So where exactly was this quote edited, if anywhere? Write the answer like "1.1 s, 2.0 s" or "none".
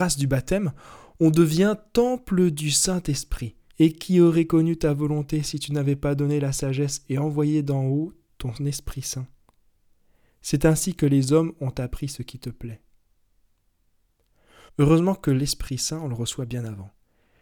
3.7 s, 14.7 s